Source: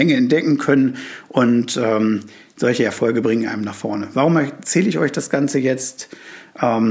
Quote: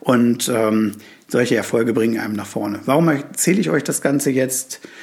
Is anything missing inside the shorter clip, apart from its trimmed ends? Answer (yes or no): no